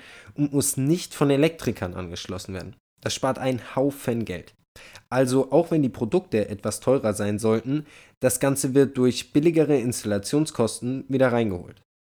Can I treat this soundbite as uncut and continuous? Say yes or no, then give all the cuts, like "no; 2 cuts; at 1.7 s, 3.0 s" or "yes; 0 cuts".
yes; 0 cuts